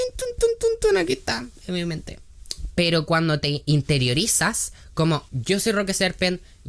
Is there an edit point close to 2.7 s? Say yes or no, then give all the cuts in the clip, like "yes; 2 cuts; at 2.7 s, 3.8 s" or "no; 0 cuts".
yes; 2 cuts; at 2.7 s, 5.3 s